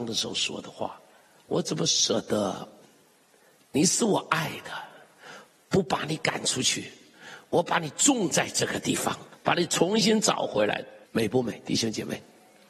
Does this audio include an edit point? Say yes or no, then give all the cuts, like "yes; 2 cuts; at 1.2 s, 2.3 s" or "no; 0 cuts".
yes; 2 cuts; at 2.8 s, 11.0 s